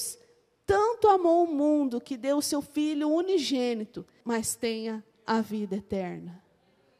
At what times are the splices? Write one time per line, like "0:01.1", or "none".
0:04.2